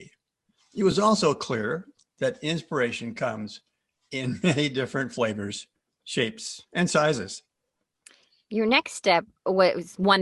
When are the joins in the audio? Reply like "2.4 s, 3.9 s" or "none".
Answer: none